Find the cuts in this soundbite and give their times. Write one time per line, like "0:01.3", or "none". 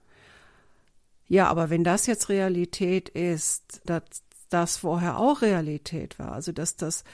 0:03.9